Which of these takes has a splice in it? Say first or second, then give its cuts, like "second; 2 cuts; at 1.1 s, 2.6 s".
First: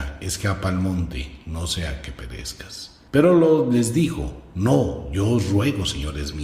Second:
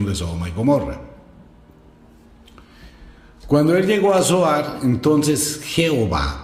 first; 1 cut; at 3.1 s